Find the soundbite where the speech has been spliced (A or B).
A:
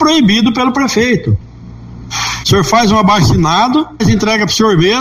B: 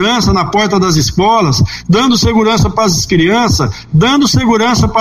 A